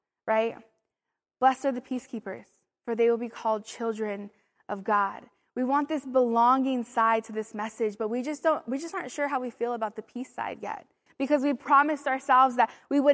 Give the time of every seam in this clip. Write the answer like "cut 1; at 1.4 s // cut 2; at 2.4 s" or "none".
cut 1; at 11.1 s